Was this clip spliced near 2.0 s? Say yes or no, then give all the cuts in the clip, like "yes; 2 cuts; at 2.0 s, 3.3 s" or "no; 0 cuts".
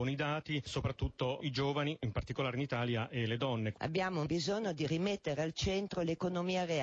no; 0 cuts